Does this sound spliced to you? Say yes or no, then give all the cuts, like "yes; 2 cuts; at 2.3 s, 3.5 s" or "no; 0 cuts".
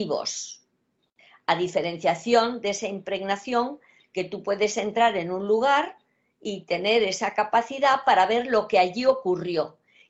no; 0 cuts